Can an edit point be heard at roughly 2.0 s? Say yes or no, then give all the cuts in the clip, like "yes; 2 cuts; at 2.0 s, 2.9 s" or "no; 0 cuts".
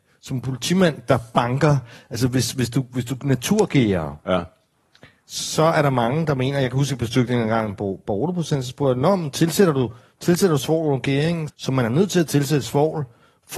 no; 1 cut; at 11.5 s